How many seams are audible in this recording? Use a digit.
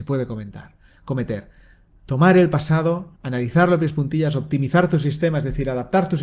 1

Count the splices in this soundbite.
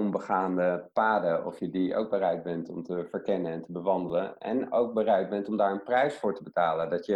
0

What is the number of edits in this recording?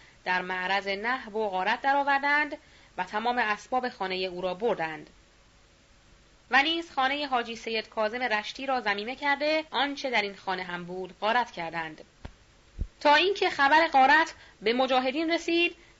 2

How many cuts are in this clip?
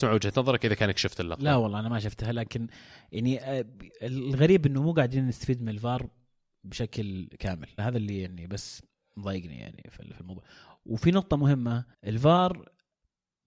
2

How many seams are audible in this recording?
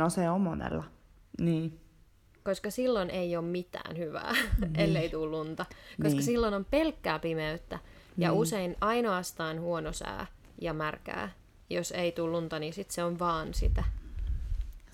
0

